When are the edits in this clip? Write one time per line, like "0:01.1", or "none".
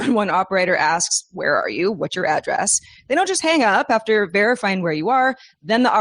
none